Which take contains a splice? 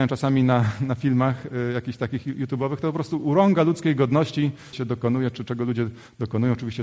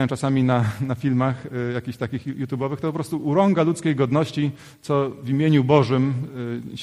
first; 1 cut; at 4.7 s

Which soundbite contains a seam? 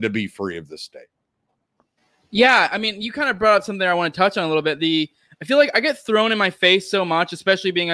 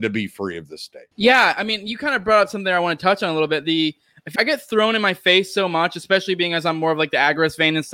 second; 2 cuts; at 1.1 s, 4.4 s

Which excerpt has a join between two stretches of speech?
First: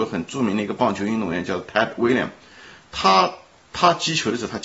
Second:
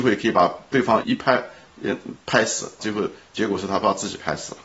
second; 2 cuts; at 1.0 s, 2.8 s

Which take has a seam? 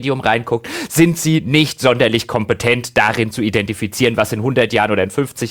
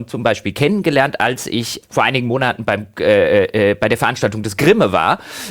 second; 1 cut; at 1.8 s

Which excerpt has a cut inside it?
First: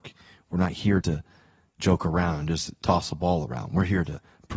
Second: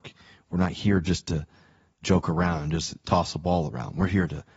first; 1 cut; at 1.0 s

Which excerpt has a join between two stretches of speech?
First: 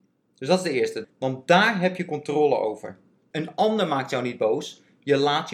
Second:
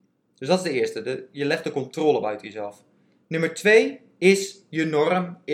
first; 2 cuts; at 1.0 s, 3.3 s

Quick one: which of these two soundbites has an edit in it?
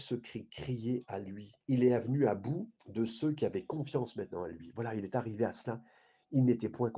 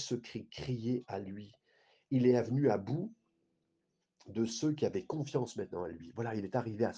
first; 2 cuts; at 1.6 s, 2.8 s

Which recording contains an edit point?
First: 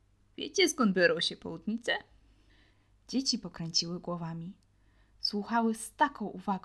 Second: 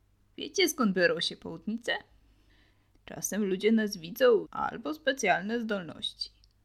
second; 2 cuts; at 2.9 s, 4.4 s

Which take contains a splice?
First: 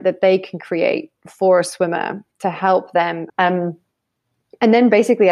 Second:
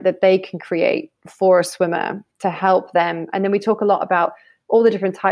first; 1 cut; at 3.3 s

